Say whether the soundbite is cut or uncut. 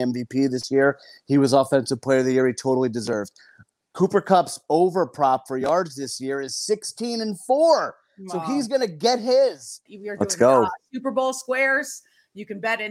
cut